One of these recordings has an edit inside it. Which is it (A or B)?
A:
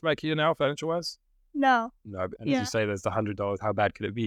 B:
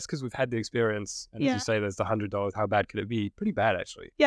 A